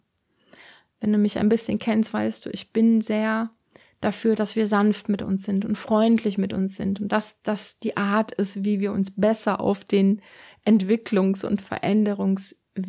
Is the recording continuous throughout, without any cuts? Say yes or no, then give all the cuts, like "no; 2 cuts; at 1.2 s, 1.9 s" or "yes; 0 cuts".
yes; 0 cuts